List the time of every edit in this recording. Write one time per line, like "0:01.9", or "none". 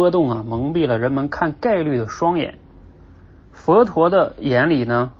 none